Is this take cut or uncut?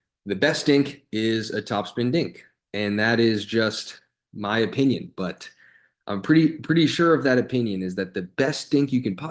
uncut